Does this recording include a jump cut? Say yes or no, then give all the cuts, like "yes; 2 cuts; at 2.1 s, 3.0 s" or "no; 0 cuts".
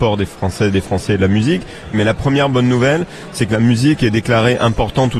yes; 1 cut; at 1.9 s